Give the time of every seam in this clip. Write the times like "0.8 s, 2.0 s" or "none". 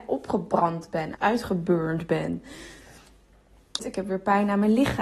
1.1 s, 3.8 s